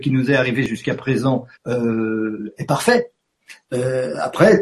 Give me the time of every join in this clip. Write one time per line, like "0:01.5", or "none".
0:01.5
0:03.7

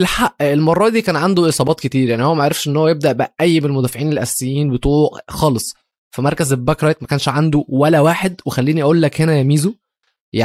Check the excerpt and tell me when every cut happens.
none

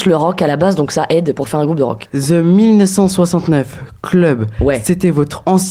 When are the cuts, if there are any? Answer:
0:02.1

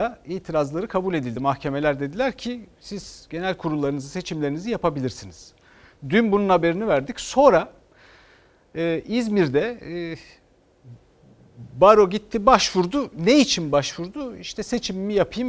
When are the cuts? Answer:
none

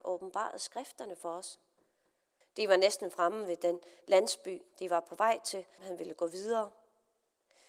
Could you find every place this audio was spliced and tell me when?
0:02.4
0:05.8

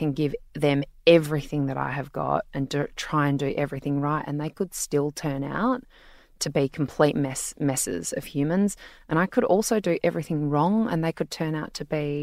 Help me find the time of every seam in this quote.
none

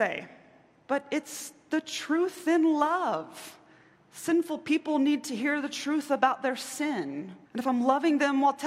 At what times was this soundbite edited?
0:07.5

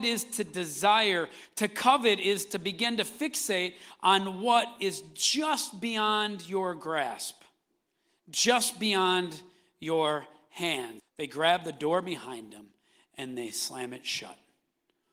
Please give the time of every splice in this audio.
0:11.0

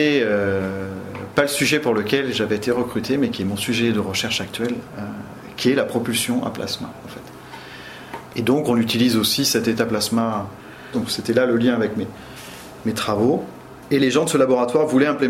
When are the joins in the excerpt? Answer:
0:08.3
0:10.9

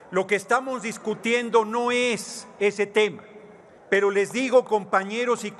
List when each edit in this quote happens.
0:03.8

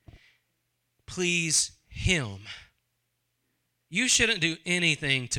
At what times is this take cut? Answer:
none

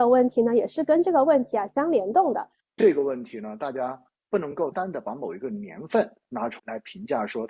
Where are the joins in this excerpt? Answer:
0:02.7
0:04.7
0:06.6

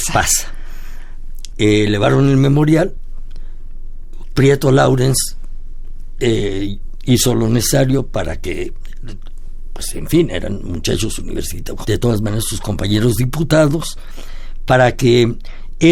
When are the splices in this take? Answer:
0:01.5
0:11.8

